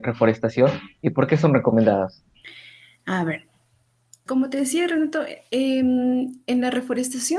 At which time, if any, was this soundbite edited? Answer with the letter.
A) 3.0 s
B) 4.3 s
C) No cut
B